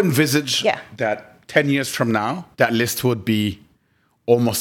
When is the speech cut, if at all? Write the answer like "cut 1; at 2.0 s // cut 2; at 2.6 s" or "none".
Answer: cut 1; at 2.5 s